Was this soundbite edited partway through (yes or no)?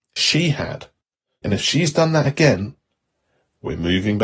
yes